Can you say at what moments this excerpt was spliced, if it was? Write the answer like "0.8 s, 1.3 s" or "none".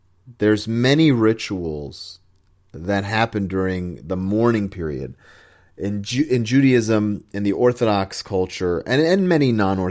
none